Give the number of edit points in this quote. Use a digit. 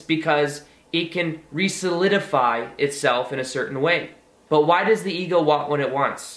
1